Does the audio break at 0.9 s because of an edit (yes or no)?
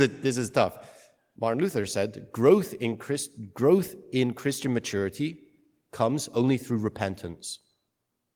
no